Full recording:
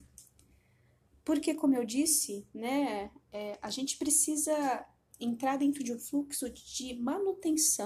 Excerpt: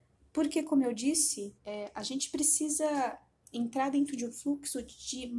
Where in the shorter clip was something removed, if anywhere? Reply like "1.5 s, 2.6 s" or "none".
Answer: 1.6 s